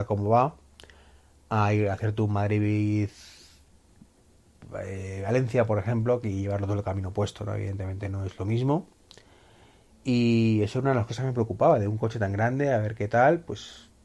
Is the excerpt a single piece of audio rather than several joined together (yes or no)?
no